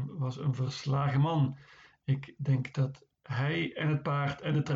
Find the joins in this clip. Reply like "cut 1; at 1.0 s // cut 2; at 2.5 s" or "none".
none